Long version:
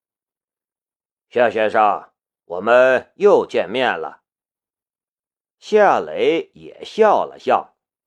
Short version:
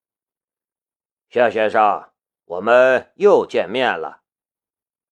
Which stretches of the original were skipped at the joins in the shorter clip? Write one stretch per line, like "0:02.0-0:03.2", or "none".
none